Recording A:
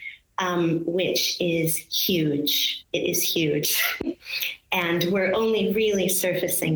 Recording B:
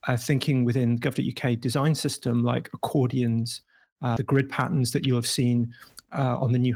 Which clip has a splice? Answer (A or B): B